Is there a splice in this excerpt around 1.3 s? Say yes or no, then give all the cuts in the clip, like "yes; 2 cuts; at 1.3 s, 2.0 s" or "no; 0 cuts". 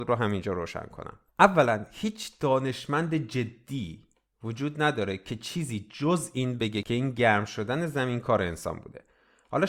yes; 1 cut; at 1.3 s